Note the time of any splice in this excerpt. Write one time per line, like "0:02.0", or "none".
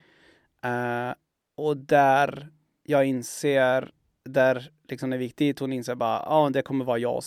none